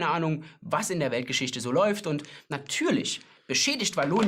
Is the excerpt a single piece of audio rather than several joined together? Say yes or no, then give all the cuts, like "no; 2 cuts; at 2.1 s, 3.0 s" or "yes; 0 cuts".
yes; 0 cuts